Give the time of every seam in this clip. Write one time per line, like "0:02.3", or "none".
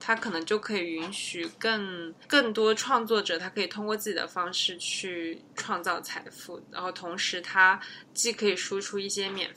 0:02.2